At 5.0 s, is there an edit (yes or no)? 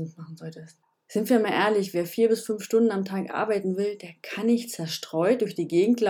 no